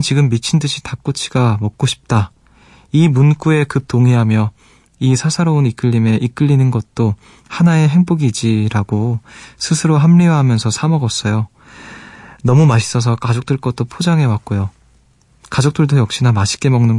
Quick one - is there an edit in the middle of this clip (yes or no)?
no